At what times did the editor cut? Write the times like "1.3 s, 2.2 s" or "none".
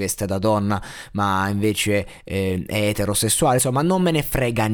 none